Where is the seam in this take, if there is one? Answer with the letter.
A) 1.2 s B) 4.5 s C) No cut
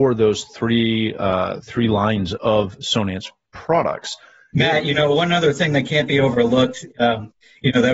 B